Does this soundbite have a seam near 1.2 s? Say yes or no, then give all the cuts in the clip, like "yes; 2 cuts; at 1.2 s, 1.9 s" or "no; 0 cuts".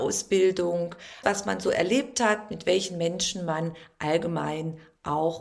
yes; 1 cut; at 1.2 s